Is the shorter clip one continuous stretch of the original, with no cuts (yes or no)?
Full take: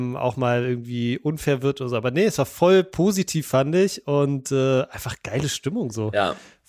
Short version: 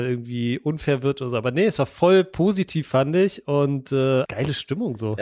no